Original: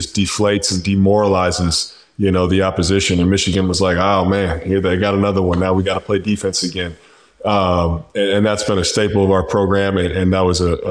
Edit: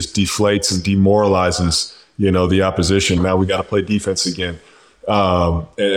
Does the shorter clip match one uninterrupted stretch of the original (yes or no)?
no